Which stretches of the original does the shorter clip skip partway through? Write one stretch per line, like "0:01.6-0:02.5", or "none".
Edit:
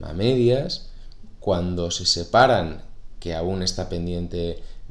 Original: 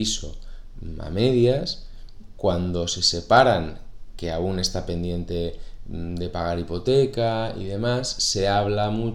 none